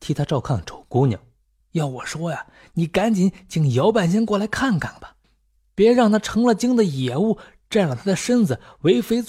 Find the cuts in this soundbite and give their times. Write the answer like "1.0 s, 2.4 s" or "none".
1.6 s, 5.2 s